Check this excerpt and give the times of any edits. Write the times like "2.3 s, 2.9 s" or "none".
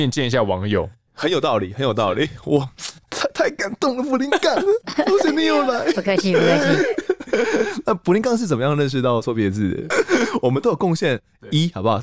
9.9 s